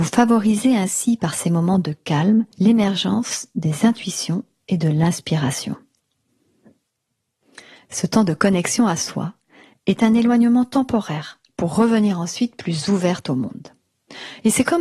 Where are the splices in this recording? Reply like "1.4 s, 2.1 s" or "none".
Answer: 2.5 s